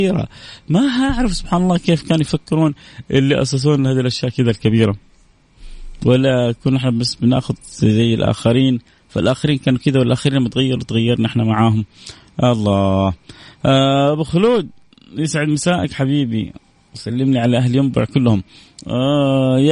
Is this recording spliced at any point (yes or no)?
no